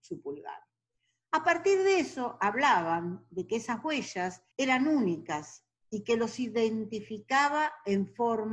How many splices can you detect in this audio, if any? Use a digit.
1